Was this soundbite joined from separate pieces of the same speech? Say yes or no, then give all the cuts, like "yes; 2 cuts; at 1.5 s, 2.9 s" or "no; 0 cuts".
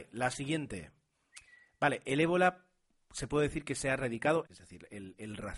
yes; 1 cut; at 4.5 s